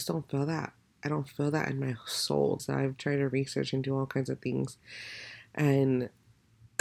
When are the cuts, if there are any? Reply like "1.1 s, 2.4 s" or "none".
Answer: 2.6 s